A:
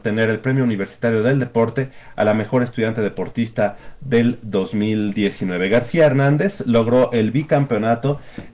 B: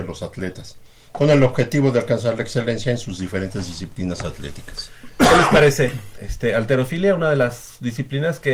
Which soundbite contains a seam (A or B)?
B